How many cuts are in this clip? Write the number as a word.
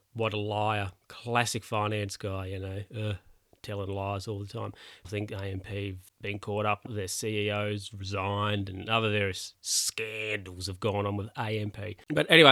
two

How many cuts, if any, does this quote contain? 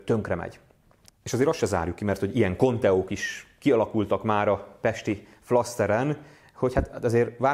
one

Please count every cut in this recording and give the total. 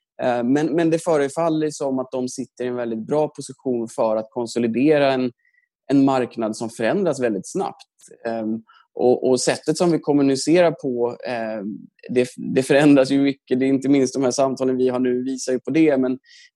zero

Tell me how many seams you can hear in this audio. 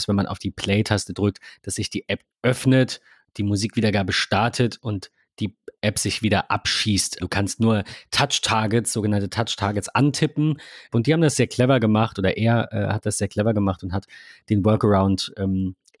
two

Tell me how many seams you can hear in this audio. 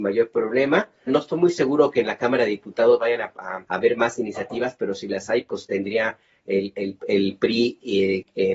two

